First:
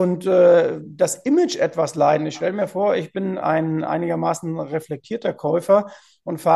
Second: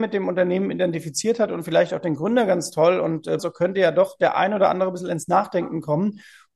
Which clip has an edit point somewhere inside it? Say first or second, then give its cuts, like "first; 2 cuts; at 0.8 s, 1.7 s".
second; 1 cut; at 3.4 s